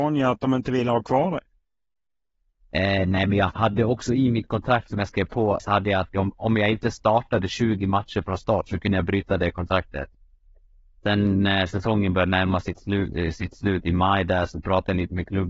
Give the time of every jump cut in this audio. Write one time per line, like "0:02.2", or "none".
0:05.6